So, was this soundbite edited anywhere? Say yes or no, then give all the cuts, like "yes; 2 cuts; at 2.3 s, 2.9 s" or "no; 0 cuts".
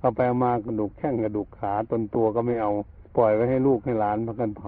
yes; 1 cut; at 3.1 s